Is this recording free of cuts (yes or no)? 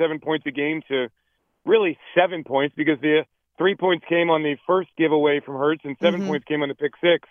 yes